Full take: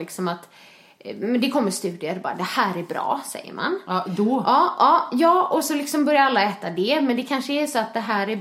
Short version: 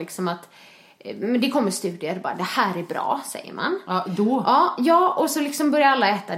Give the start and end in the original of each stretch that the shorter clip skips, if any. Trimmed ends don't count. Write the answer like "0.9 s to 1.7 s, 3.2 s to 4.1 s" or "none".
4.8 s to 5.1 s